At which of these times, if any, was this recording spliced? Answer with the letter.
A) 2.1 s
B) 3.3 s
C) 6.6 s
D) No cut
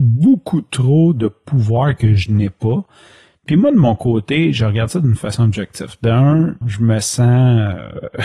C